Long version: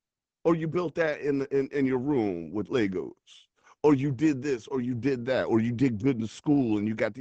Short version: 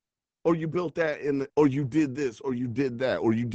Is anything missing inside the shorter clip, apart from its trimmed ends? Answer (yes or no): yes